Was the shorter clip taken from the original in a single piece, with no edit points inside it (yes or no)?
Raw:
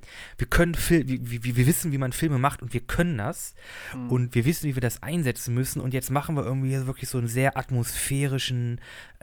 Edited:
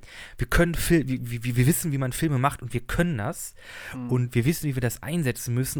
yes